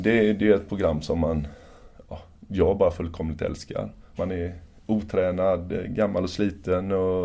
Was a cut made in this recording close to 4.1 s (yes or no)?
yes